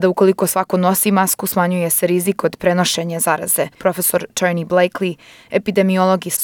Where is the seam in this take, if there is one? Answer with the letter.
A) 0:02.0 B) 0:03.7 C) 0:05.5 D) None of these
B